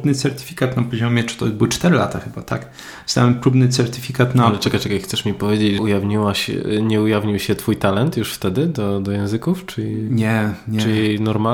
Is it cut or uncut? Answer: cut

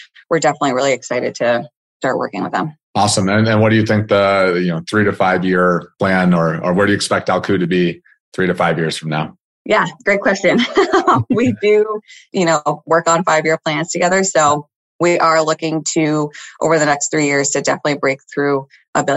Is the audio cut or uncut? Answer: uncut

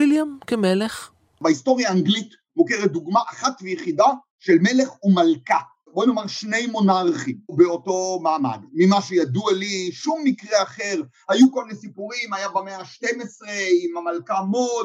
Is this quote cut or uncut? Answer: uncut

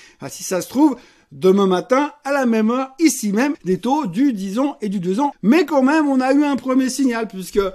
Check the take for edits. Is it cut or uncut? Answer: cut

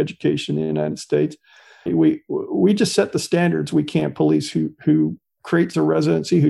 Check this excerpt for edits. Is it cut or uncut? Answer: cut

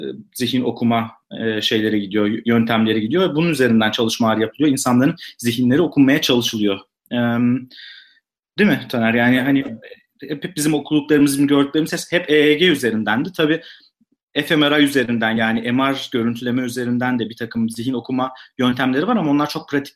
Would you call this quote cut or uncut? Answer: uncut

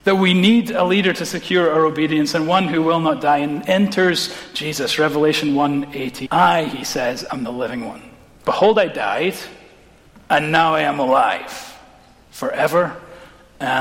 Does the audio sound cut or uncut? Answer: cut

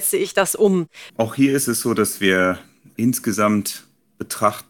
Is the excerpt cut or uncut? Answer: cut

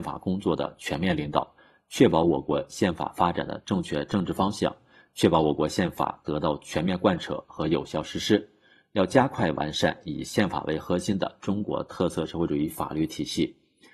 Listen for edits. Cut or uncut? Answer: uncut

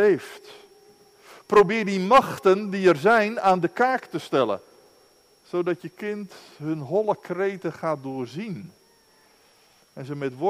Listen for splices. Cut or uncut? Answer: uncut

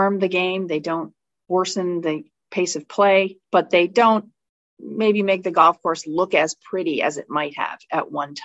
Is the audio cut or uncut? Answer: cut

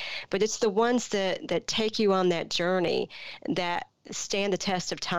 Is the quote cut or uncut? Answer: uncut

